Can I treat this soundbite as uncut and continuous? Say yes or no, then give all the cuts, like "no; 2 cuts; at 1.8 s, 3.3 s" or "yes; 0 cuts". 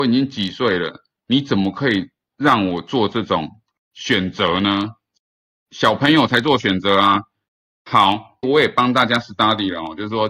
no; 2 cuts; at 5.6 s, 8.4 s